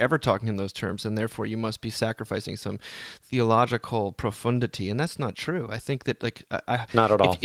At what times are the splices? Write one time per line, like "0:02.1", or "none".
none